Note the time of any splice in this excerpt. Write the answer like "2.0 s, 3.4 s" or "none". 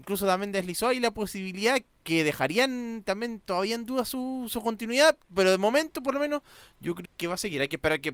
7.1 s